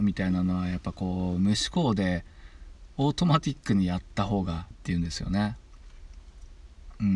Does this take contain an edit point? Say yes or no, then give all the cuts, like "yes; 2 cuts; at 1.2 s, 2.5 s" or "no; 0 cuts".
yes; 1 cut; at 4.7 s